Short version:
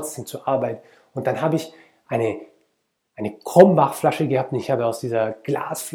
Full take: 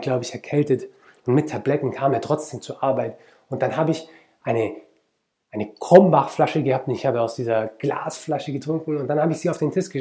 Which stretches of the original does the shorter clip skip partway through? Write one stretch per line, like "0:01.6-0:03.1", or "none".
none